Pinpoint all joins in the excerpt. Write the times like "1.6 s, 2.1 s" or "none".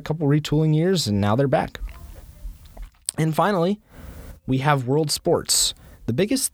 none

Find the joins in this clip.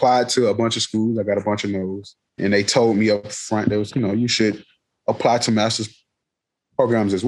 2.4 s, 3.9 s

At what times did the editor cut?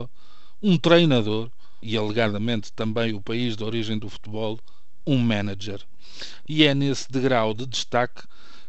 1.8 s, 6.5 s

